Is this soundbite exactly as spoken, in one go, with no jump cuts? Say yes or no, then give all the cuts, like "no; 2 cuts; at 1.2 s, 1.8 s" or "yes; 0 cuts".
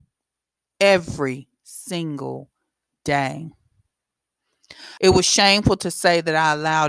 no; 1 cut; at 5.0 s